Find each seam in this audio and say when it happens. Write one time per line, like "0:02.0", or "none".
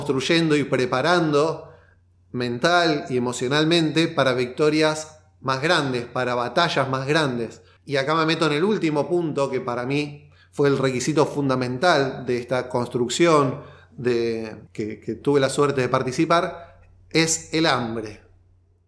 0:07.8
0:14.7